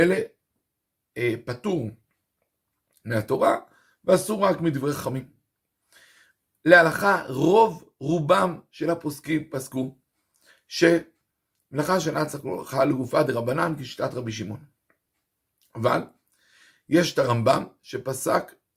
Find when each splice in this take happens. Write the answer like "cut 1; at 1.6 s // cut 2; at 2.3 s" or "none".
none